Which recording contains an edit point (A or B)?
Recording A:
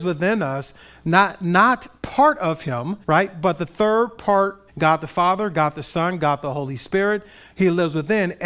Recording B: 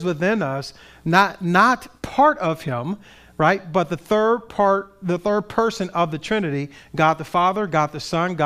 A